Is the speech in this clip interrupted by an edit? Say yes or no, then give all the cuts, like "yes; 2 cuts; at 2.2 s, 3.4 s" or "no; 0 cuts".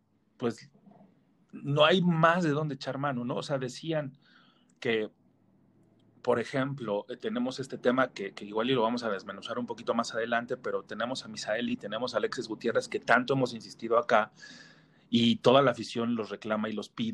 no; 0 cuts